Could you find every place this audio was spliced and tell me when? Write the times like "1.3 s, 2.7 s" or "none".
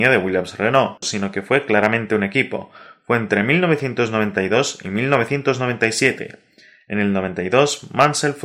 1.0 s

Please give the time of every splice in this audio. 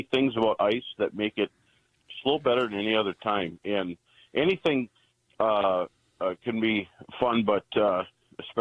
none

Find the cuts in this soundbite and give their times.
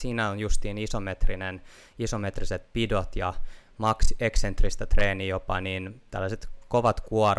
none

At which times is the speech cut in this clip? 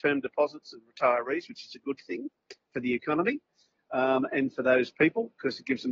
none

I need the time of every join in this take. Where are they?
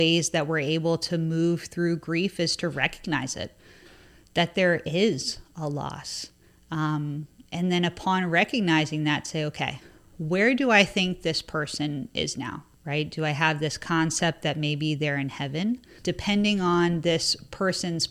12.7 s, 16.0 s

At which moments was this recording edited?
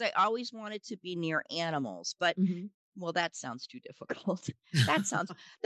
2.7 s

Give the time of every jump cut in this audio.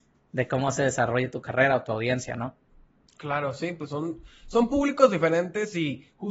none

